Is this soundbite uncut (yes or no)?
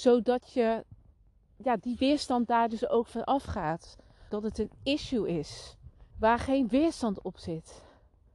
no